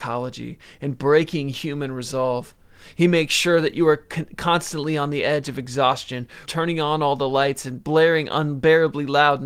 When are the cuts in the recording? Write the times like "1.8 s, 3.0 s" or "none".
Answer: 6.5 s